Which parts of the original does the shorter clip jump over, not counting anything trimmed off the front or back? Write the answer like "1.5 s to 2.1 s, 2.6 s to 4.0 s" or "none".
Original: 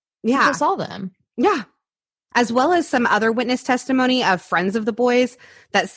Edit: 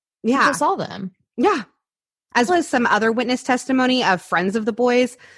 2.5 s to 2.7 s